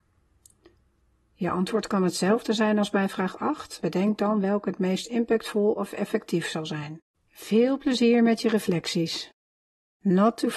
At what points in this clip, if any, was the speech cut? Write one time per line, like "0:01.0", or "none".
0:03.8
0:07.1